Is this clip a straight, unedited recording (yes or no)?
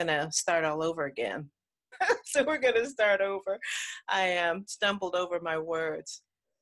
no